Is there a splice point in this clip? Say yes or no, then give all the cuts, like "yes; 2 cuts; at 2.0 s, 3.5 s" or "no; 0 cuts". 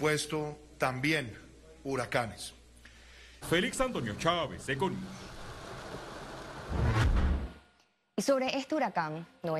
yes; 1 cut; at 3.4 s